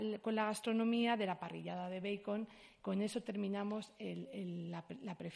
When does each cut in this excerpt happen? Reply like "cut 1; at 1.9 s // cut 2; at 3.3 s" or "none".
none